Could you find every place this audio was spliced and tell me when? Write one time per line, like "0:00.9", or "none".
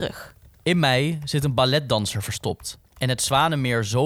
0:02.9